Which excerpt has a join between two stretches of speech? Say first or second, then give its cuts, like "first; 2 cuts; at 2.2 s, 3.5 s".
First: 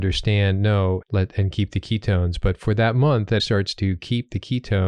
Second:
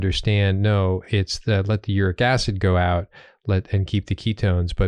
first; 2 cuts; at 1.0 s, 3.4 s